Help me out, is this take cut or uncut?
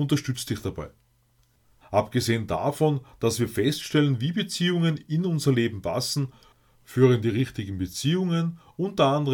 cut